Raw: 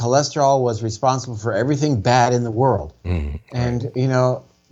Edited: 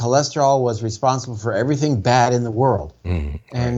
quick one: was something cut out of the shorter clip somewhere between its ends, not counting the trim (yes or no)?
no